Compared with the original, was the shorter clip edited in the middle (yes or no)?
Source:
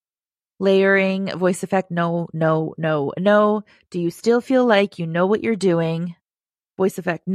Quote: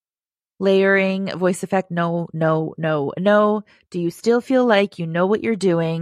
no